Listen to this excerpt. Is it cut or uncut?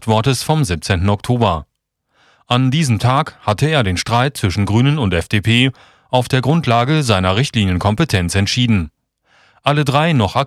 uncut